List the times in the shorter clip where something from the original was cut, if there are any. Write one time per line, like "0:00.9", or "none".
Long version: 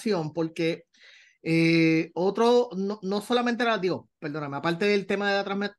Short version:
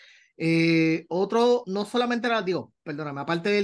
0:01.6